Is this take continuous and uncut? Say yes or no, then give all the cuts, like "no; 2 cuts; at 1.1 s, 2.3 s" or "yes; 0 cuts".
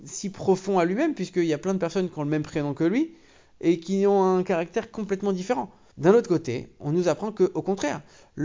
no; 1 cut; at 5.9 s